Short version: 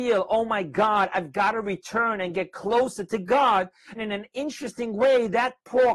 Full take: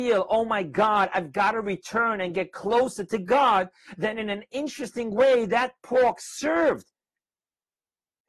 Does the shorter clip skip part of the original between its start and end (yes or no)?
yes